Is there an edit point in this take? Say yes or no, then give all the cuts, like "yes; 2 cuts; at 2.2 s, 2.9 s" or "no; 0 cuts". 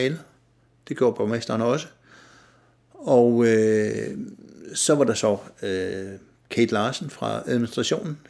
no; 0 cuts